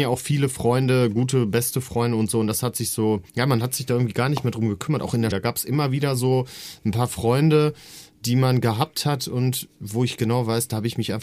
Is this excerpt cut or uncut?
cut